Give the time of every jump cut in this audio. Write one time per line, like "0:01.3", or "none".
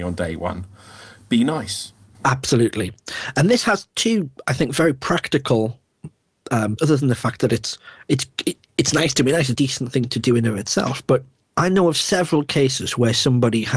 0:02.1
0:06.8
0:09.5